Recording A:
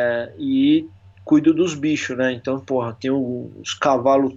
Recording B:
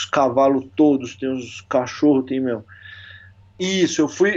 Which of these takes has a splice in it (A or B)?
B